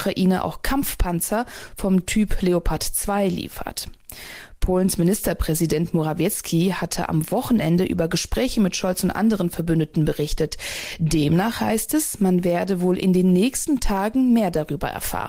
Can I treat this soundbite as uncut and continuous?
yes; 0 cuts

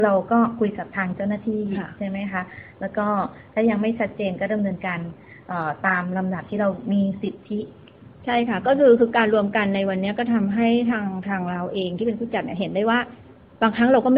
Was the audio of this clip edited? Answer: no; 0 cuts

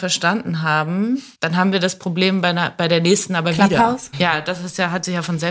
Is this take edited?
yes; 2 cuts; at 1.3 s, 4.1 s

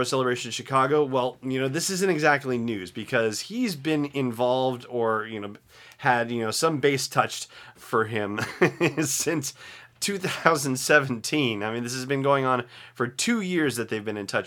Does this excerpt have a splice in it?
no; 0 cuts

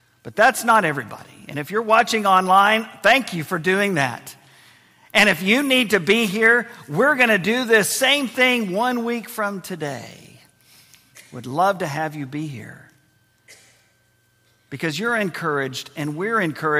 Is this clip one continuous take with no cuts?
yes; 0 cuts

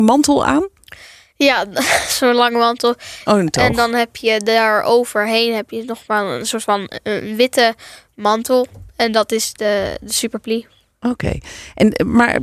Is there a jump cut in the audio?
yes; 1 cut; at 3.2 s

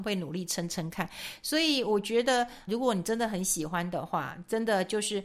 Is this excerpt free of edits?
no; 1 cut; at 2.7 s

